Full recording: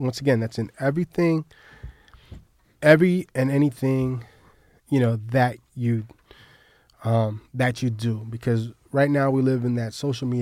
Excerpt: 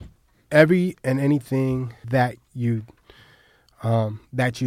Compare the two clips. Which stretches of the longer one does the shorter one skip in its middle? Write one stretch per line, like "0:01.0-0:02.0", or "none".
0:04.4-0:05.3